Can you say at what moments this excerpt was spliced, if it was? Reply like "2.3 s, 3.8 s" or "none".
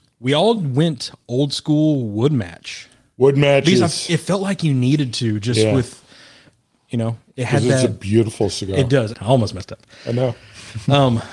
9.1 s